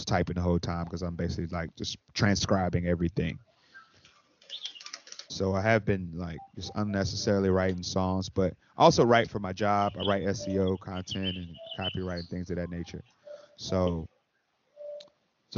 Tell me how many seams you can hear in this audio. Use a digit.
1